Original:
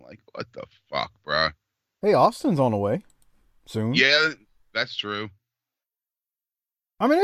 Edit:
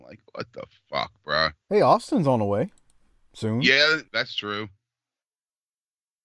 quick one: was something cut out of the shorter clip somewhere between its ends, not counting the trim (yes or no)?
yes